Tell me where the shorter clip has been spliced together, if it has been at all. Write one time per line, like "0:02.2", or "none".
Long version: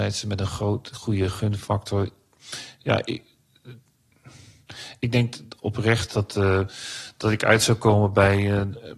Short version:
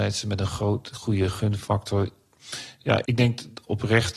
0:03.1